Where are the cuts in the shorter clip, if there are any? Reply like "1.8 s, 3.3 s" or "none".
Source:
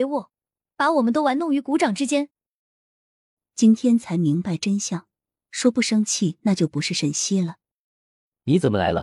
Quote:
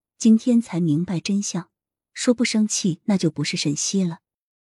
none

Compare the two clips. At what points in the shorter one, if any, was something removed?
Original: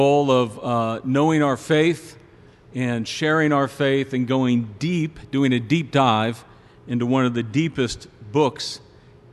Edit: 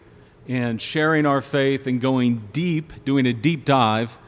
none

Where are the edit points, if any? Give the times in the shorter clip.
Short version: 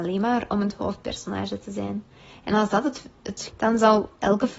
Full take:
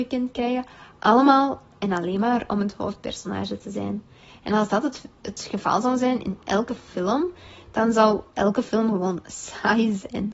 3.5 s

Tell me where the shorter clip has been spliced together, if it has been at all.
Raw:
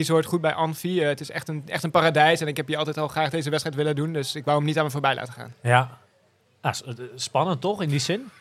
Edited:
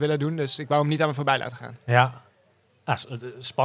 none

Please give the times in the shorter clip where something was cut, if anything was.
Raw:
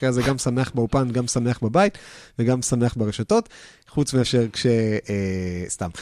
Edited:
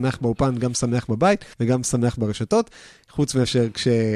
1.5 s

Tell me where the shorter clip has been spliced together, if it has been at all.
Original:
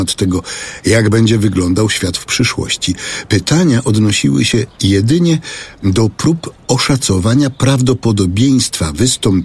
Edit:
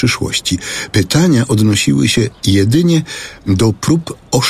none

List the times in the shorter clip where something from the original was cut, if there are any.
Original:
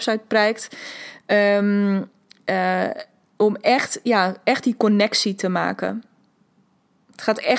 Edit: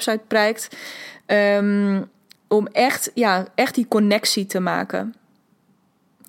2.3 s

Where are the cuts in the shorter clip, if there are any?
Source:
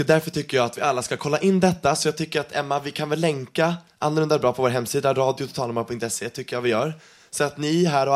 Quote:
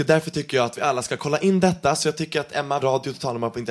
2.8 s

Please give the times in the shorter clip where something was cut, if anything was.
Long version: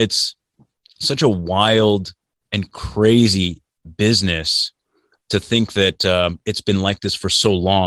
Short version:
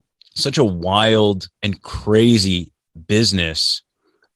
1.6 s

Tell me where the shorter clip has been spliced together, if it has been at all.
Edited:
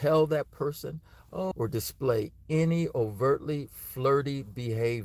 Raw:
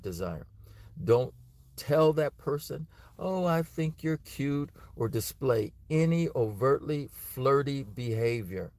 1.5 s

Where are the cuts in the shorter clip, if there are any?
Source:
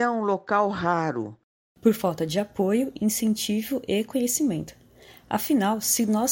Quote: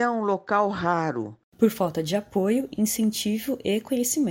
1.5 s

